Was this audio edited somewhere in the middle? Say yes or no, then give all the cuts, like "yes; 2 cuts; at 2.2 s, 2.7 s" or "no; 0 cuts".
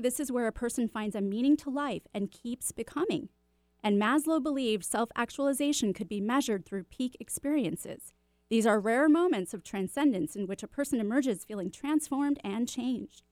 no; 0 cuts